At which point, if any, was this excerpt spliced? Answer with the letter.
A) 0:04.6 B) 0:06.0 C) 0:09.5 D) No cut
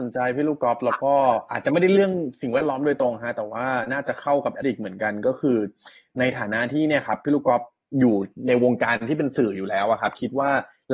A